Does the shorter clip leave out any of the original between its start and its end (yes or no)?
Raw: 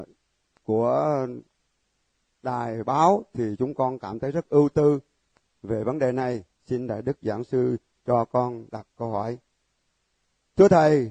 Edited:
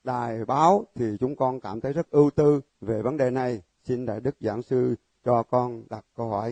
yes